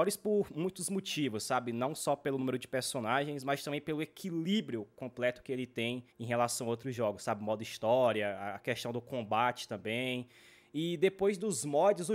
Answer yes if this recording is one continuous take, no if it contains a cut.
no